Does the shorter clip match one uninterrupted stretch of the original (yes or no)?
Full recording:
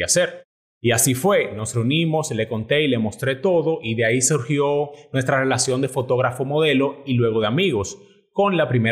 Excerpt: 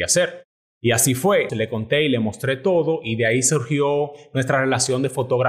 no